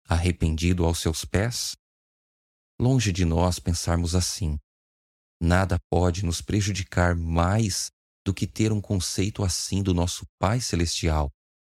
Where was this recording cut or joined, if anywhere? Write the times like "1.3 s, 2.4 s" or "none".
none